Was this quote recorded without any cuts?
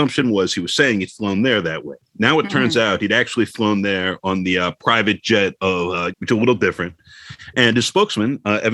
no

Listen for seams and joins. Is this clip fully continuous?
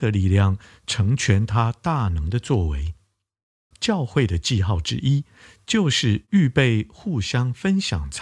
no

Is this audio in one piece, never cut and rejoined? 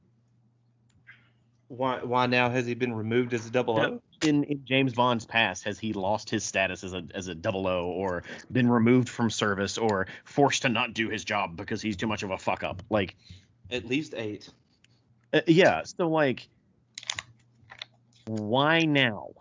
no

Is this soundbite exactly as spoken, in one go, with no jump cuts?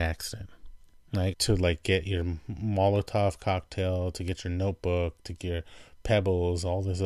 no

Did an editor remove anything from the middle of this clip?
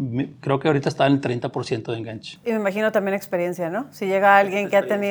yes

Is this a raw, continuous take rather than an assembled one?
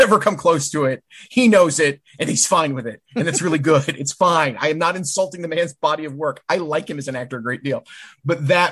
yes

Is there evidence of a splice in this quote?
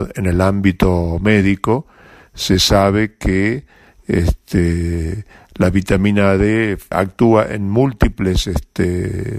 yes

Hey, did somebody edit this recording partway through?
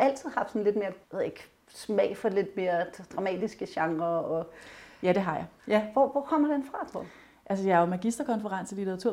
yes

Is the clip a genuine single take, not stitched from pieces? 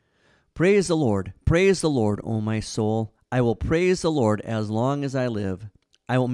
yes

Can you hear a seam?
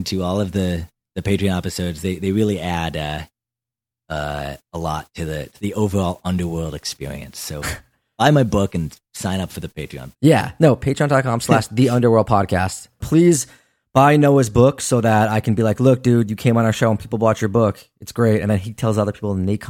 yes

